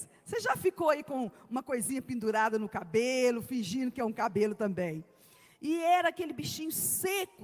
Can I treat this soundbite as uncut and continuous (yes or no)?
no